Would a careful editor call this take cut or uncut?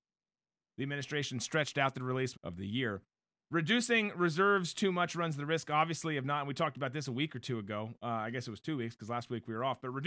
cut